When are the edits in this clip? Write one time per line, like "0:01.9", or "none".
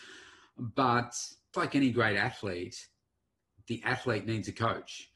0:01.5

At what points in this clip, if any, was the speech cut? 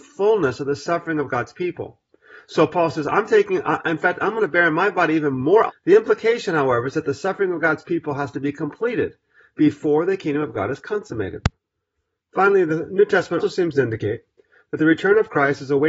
0:05.7
0:13.4

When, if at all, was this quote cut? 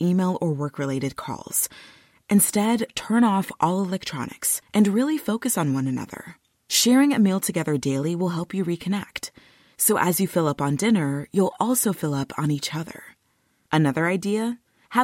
none

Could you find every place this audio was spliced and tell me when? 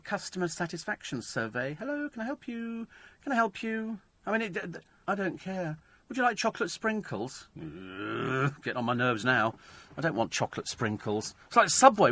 0:05.0

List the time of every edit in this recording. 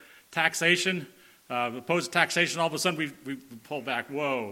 none

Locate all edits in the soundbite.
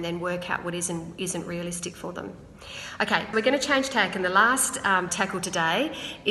0:03.3
0:05.1

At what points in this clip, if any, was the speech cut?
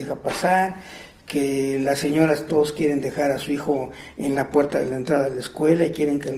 none

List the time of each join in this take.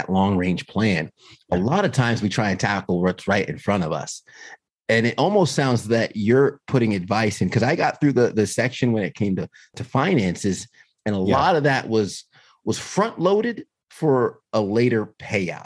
none

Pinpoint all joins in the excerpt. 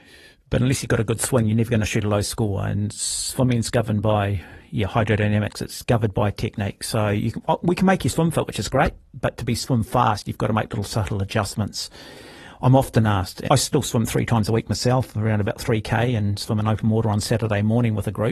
0:13.5

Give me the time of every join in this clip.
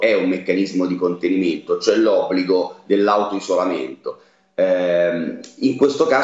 none

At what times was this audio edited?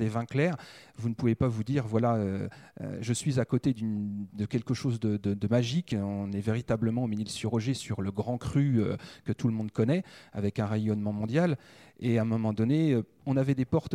none

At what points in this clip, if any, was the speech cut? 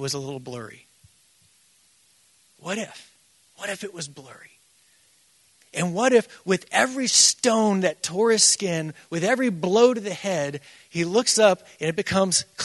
none

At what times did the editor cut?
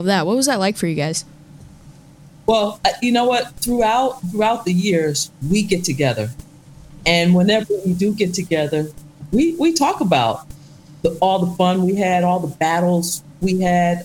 0:04.2

